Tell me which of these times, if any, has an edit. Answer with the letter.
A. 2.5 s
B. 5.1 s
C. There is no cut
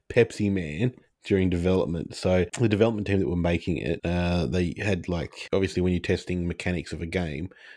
A